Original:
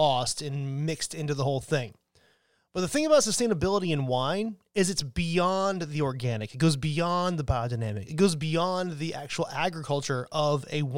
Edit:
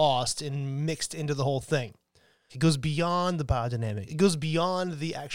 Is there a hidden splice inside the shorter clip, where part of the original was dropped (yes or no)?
yes